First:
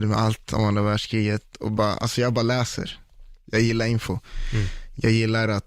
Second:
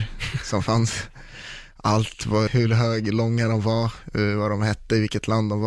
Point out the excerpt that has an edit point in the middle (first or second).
second